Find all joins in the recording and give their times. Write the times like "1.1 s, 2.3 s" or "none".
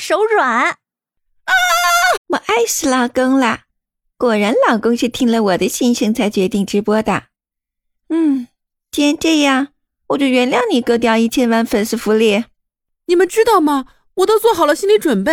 2.2 s